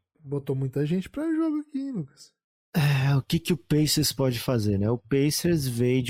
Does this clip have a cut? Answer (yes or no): no